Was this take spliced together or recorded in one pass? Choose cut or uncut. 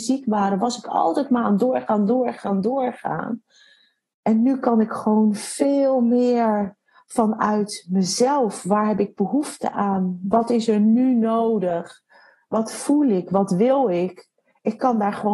uncut